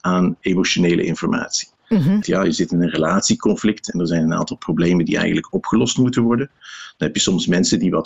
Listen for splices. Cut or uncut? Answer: cut